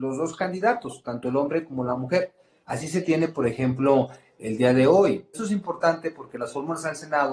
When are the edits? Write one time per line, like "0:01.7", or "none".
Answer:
0:02.6
0:05.3